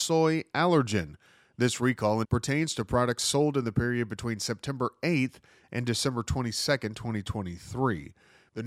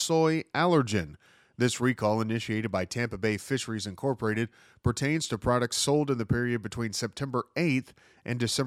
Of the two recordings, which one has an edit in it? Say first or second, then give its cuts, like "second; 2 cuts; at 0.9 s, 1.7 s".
first; 1 cut; at 2.2 s